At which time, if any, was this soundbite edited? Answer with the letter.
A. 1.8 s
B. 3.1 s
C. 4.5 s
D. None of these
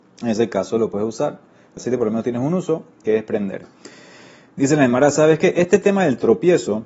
A